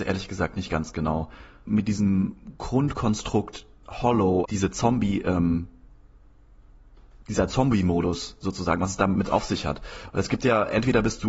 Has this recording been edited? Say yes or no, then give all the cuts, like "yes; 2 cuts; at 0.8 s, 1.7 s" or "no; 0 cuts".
yes; 2 cuts; at 1.7 s, 4.4 s